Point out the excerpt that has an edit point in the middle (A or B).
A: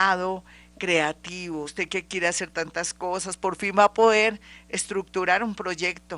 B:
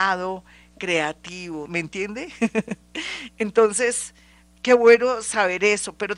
B